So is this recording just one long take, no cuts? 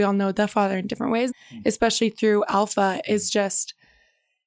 no; 1 cut; at 1.3 s

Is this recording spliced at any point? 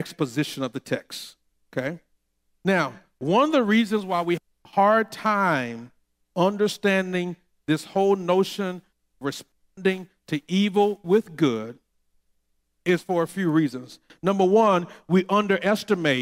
no; 0 cuts

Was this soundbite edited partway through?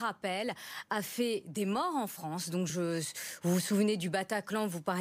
yes; 1 cut; at 2.7 s

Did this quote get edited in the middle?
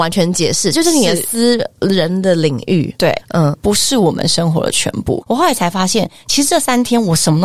yes; 2 cuts; at 3.5 s, 5.2 s

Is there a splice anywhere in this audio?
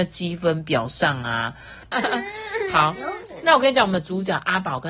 yes; 1 cut; at 1.9 s

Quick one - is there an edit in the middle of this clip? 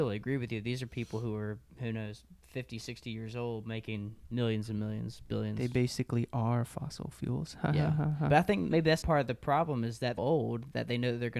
yes; 2 cuts; at 9.0 s, 10.2 s

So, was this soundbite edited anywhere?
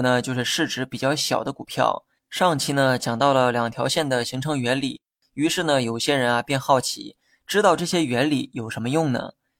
yes; 1 cut; at 2.2 s

